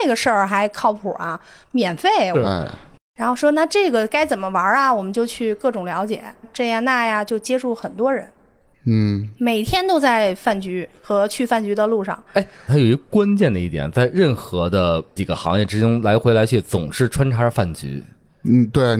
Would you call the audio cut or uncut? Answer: cut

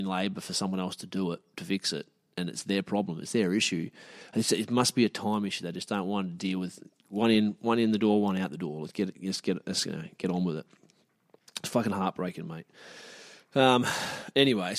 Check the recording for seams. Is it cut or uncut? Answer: uncut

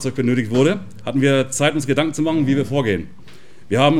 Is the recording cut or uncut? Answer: uncut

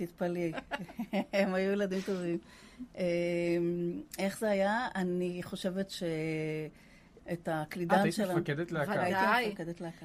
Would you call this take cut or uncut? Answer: cut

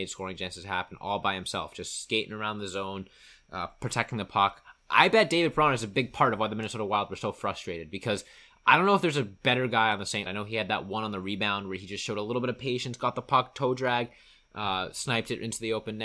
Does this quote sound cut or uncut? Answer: cut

